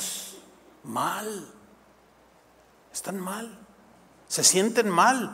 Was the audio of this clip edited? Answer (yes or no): no